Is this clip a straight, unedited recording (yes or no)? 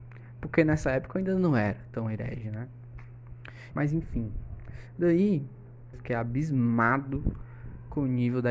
no